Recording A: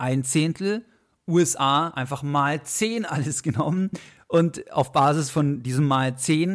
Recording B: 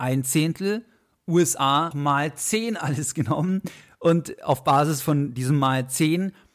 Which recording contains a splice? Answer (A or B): B